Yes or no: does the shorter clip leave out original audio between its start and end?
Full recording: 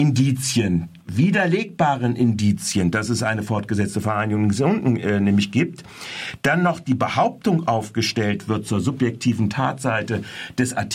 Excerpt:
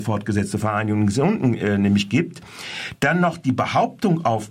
no